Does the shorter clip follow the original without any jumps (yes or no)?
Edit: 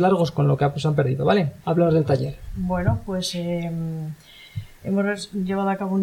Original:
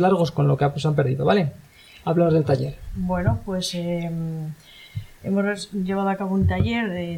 no